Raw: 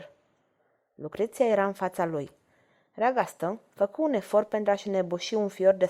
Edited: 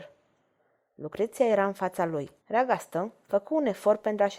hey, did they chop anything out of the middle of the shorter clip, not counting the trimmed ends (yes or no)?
yes